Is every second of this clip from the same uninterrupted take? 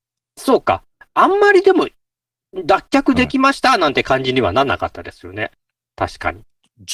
yes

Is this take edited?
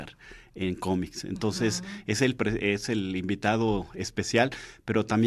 no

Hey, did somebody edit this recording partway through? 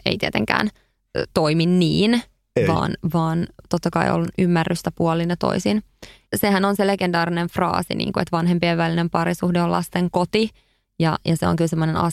no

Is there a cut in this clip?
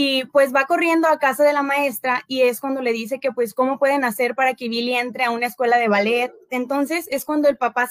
yes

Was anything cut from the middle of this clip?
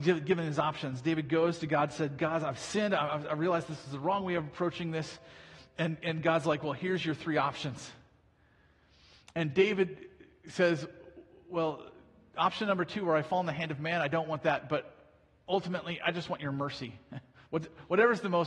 no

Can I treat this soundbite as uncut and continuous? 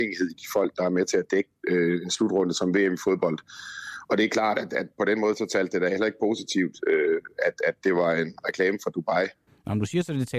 no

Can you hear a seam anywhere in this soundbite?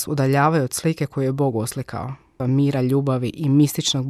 yes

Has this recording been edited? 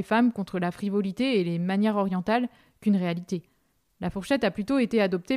no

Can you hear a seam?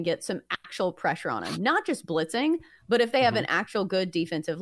no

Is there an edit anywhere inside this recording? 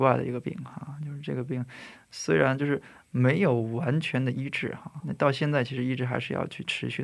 yes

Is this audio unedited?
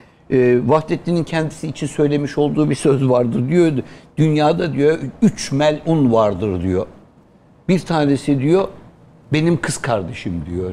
yes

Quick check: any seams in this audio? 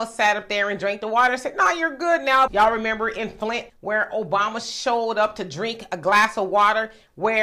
yes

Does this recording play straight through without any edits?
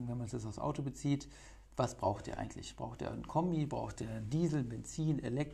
yes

